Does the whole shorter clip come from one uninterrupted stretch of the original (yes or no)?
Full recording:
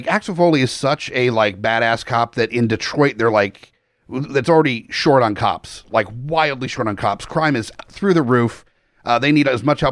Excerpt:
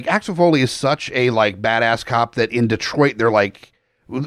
yes